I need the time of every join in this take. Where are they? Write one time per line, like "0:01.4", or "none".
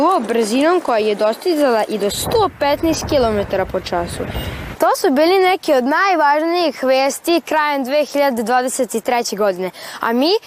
0:04.7

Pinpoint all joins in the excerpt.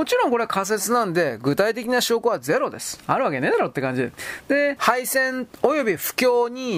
0:04.8

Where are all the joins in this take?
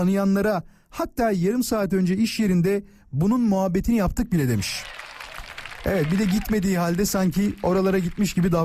none

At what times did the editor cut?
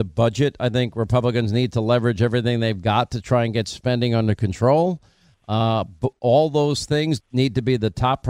0:07.2

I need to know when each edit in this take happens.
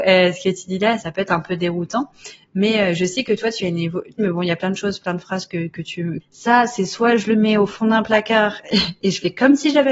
0:01.0
0:04.2
0:06.2

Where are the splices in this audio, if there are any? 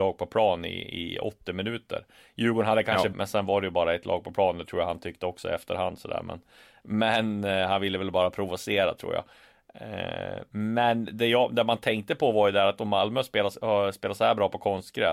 0:03.1

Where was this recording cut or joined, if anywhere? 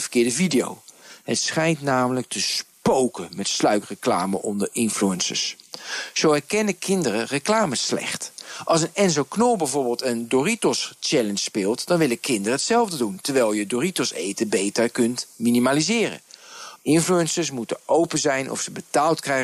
0:16.8

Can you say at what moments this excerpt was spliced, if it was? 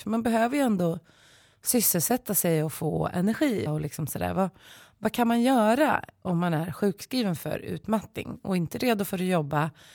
0:03.7

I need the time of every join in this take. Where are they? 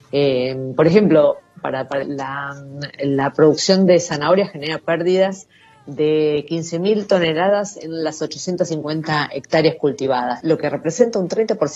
0:02.0
0:10.4

